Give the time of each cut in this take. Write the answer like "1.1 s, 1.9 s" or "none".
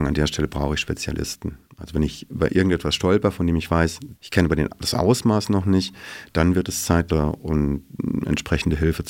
4.1 s, 7.1 s